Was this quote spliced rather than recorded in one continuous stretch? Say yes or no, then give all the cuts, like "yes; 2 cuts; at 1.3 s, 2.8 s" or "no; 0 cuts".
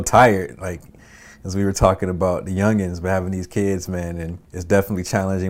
yes; 1 cut; at 4.5 s